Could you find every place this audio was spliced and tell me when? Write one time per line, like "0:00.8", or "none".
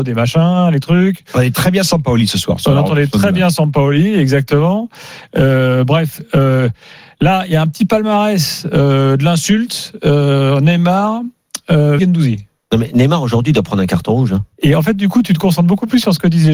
0:12.0
0:14.5